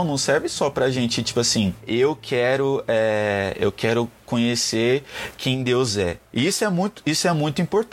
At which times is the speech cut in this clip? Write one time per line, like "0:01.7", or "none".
none